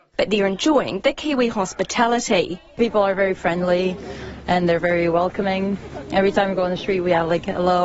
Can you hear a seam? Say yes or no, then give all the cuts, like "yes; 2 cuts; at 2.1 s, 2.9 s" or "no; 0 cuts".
no; 0 cuts